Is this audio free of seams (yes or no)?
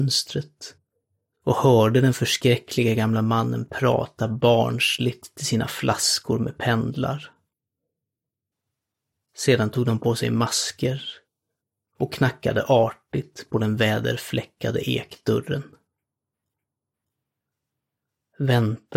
yes